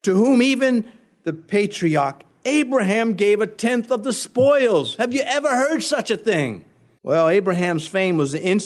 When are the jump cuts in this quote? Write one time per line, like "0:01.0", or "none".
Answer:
0:07.0